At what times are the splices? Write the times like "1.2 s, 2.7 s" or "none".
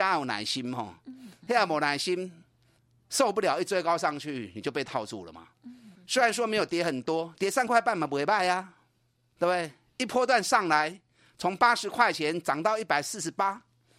5.9 s, 7.4 s